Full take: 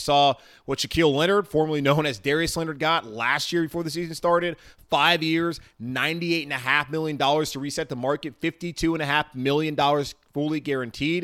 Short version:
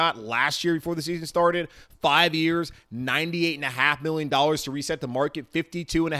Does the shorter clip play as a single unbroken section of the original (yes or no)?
yes